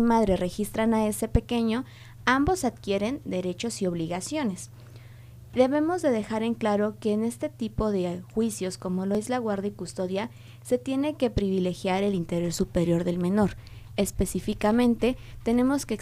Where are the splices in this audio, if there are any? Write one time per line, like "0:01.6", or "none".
none